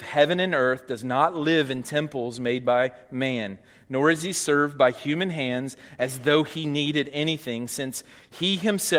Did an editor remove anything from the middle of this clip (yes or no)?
no